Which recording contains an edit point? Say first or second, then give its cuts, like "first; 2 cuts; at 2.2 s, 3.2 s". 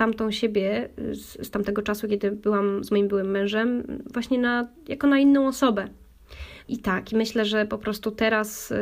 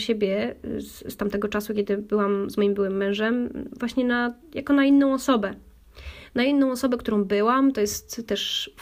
first; 1 cut; at 6.6 s